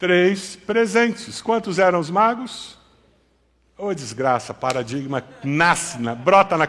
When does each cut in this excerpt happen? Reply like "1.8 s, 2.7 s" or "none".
none